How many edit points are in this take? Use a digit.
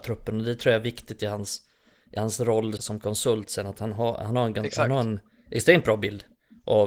1